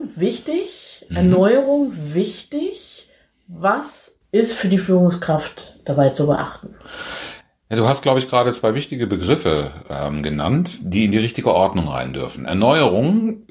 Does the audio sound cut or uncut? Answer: uncut